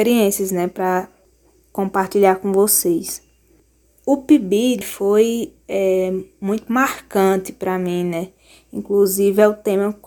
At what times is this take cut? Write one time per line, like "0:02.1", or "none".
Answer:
0:04.8